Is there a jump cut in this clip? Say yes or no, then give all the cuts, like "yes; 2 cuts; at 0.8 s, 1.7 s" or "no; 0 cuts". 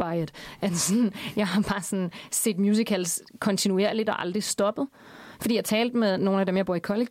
no; 0 cuts